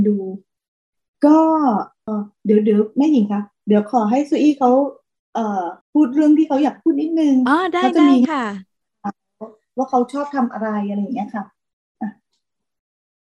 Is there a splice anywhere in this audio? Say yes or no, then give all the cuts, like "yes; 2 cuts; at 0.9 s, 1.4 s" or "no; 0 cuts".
yes; 2 cuts; at 2.1 s, 5.8 s